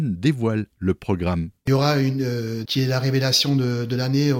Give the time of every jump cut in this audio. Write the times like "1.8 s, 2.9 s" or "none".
2.6 s